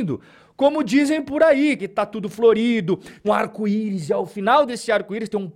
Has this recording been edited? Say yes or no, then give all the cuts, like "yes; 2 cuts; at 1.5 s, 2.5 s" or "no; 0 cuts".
yes; 2 cuts; at 1.8 s, 3.2 s